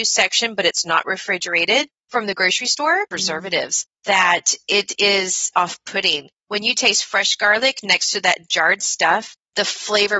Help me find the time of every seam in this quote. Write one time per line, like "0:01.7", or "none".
0:03.1
0:05.5